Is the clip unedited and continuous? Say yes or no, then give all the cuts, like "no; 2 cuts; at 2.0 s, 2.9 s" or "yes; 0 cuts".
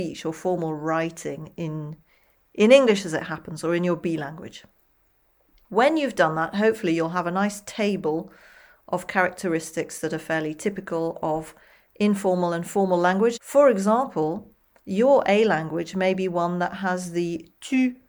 no; 1 cut; at 13.4 s